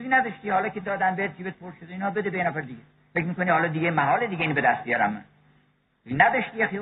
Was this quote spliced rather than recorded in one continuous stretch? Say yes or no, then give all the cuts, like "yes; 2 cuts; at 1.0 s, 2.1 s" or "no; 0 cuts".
no; 0 cuts